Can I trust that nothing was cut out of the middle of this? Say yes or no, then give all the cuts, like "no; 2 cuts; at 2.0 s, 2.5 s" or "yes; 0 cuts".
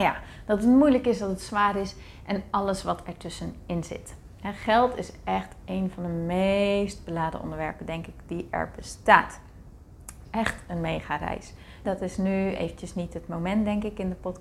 no; 2 cuts; at 10.2 s, 11.8 s